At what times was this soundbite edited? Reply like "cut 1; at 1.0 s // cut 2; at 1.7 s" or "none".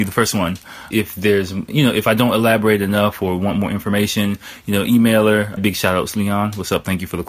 cut 1; at 0.9 s // cut 2; at 5.6 s